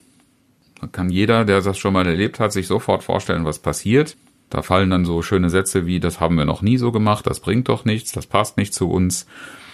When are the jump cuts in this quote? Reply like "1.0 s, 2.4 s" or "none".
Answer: none